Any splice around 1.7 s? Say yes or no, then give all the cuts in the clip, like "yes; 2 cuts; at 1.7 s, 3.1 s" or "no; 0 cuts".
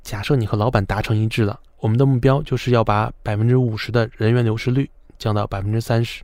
yes; 1 cut; at 1.7 s